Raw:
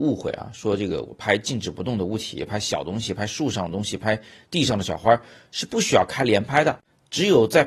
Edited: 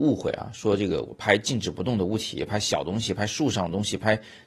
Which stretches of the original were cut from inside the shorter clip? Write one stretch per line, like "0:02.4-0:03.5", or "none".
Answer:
none

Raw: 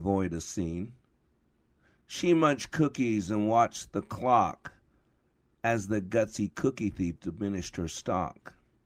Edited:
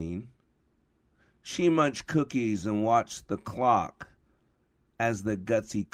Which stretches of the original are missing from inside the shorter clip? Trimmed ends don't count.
none

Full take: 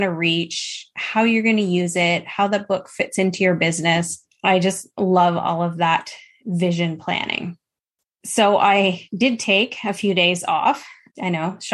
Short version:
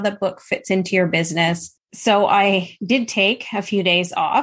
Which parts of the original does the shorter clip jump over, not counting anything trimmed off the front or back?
0:04.3-0:08.1

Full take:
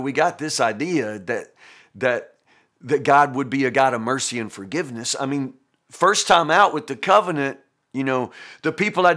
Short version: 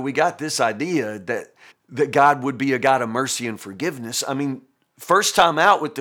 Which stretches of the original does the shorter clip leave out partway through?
0:01.7-0:02.6

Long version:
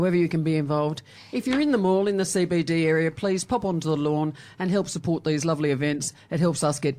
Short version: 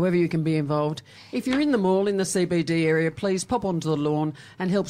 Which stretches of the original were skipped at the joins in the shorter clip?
none

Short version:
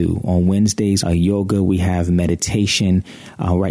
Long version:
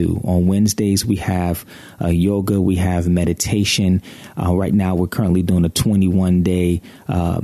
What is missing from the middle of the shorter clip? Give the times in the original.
0:01.0-0:02.0

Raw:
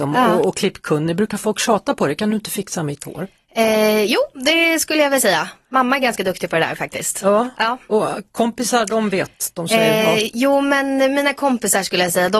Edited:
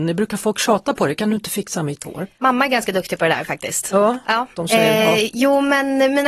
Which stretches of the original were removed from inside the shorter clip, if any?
0:03.4-0:05.7
0:07.8-0:09.5

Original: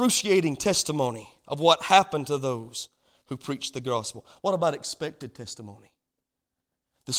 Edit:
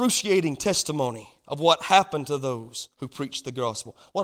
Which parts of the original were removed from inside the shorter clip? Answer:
0:02.9-0:03.2

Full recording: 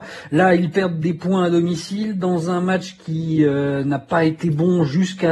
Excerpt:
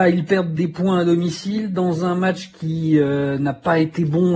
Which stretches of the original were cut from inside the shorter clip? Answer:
none

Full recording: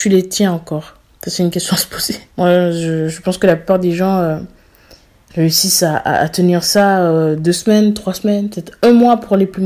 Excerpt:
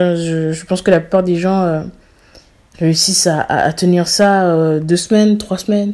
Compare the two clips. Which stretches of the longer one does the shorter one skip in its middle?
none

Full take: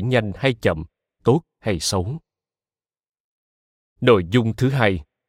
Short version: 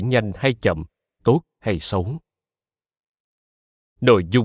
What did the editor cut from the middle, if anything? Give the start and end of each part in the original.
none

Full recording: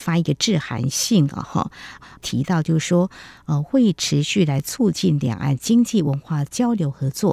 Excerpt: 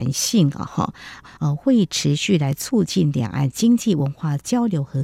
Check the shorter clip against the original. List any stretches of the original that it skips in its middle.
0:02.1-0:03.4

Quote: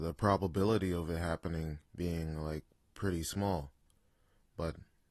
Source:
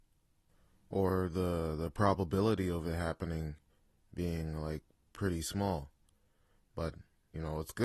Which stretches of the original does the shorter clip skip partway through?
0:03.6-0:04.1

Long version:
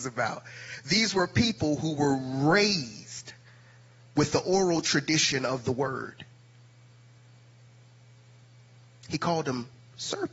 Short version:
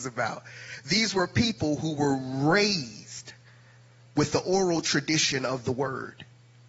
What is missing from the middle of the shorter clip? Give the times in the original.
none

